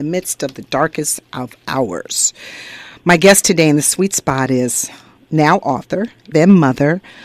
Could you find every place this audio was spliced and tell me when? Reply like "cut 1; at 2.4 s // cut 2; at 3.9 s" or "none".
cut 1; at 6.3 s